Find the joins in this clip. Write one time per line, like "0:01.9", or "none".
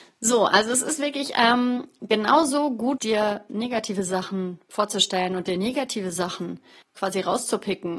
0:03.0
0:06.8